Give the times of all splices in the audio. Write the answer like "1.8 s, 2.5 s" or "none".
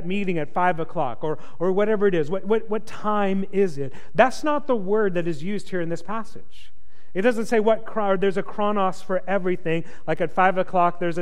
none

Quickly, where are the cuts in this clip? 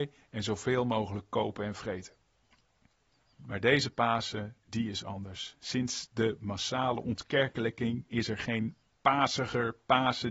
none

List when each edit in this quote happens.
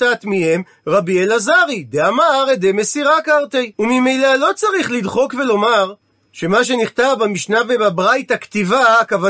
3.7 s

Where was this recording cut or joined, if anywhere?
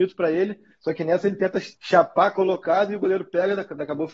1.7 s

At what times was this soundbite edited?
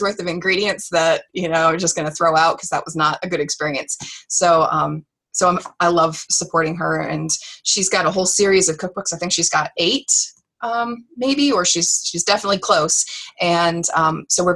none

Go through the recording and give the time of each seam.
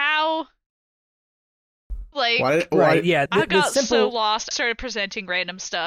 2.1 s, 3.3 s, 4.5 s

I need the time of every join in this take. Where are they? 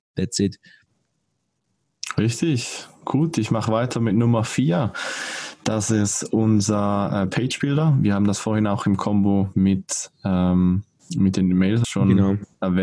11.8 s

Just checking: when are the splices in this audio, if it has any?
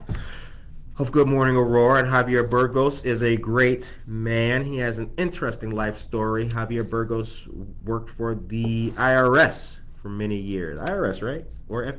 none

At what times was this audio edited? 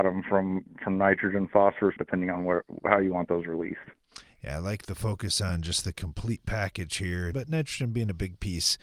2.0 s, 7.3 s

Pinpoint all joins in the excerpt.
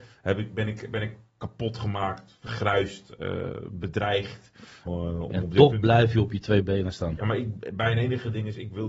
4.9 s

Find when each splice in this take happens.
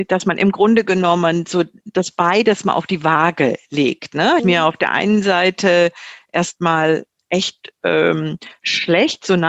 4.4 s

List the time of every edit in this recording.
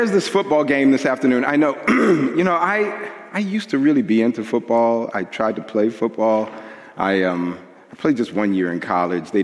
none

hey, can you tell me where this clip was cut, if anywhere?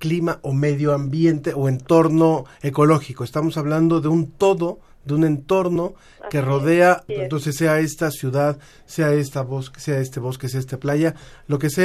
7.1 s

